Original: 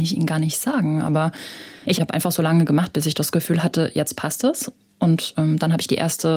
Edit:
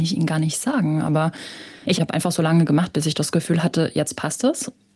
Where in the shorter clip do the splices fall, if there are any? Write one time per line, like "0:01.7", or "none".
none